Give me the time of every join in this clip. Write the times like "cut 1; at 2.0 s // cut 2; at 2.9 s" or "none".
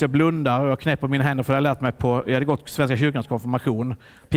none